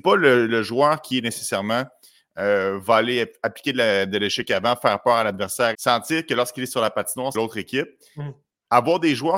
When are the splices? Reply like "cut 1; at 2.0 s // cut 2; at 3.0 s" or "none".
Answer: cut 1; at 5.7 s // cut 2; at 7.3 s